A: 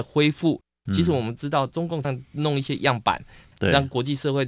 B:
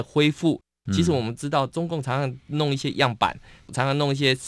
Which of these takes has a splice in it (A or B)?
A